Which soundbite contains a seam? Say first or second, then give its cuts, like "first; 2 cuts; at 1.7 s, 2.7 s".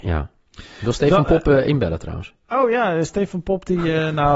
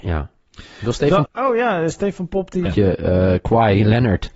second; 2 cuts; at 1.3 s, 2.7 s